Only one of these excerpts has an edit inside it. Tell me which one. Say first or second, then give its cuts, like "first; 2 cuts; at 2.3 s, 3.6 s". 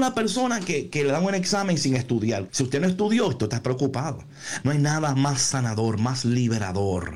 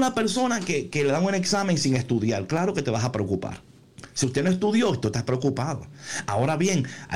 first; 2 cuts; at 2.5 s, 4.6 s